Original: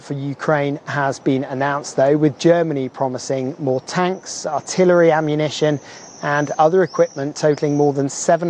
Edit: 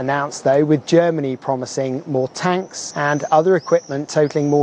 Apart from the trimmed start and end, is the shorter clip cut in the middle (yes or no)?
yes